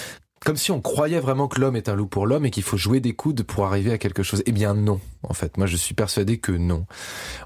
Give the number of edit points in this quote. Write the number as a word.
zero